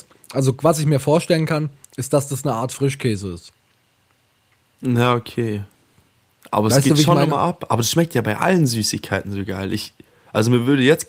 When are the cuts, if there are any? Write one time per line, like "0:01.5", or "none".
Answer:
none